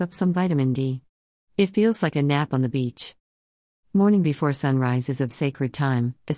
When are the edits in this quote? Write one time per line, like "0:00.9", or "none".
0:05.3